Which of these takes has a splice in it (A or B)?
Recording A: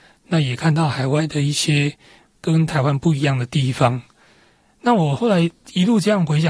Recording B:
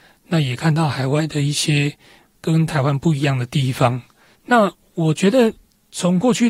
B